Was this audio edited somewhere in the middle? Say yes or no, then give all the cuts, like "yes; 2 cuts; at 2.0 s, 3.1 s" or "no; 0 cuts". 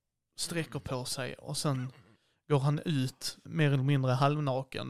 yes; 1 cut; at 3.4 s